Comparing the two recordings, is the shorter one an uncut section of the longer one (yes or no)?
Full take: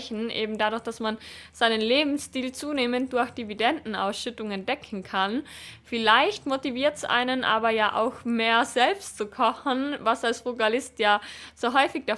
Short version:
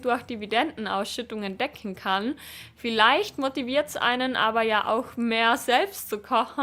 yes